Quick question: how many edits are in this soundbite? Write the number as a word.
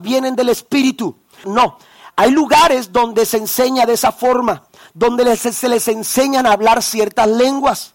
one